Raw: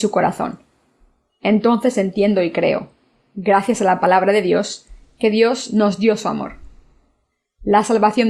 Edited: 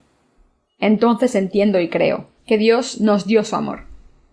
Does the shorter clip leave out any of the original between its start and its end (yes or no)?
yes